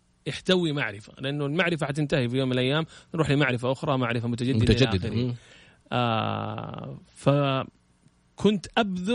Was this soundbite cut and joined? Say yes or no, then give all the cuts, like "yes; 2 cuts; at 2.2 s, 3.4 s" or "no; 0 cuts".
no; 0 cuts